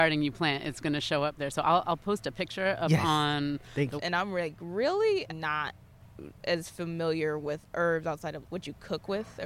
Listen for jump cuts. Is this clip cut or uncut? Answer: cut